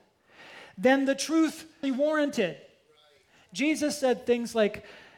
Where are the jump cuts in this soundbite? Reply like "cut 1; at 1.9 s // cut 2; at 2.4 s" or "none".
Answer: cut 1; at 1.8 s